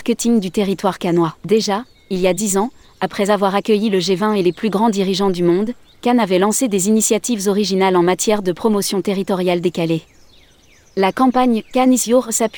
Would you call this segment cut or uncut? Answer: cut